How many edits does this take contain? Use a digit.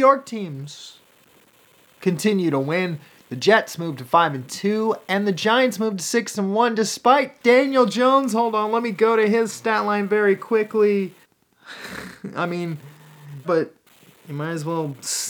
2